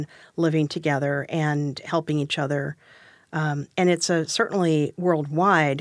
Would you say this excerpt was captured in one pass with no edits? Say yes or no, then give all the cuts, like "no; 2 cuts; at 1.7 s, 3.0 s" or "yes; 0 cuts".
yes; 0 cuts